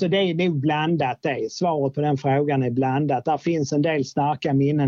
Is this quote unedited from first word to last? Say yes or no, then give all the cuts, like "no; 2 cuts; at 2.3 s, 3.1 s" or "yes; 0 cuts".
yes; 0 cuts